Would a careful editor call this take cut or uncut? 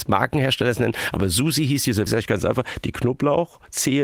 cut